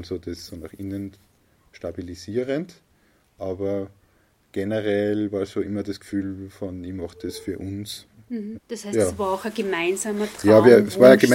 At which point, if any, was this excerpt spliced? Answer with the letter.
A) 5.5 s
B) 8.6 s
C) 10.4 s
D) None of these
B